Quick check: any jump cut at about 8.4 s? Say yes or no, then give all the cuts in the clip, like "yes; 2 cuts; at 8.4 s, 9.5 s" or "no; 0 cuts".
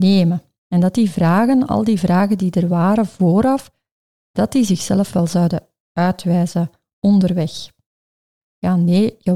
yes; 1 cut; at 8.4 s